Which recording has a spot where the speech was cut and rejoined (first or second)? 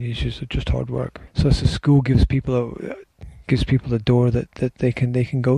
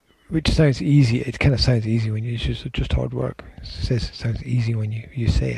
first